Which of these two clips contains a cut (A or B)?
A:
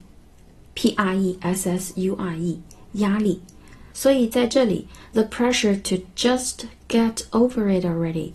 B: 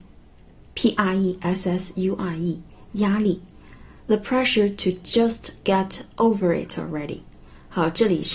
A